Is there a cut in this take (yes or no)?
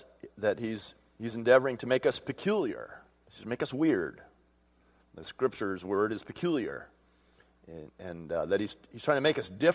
no